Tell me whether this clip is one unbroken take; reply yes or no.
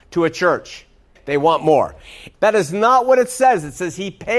no